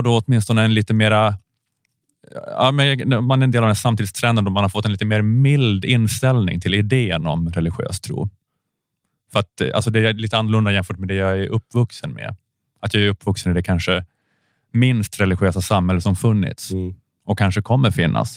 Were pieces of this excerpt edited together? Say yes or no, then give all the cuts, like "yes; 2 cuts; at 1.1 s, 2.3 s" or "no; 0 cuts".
no; 0 cuts